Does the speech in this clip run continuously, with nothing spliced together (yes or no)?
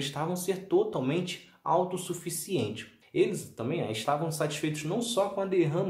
no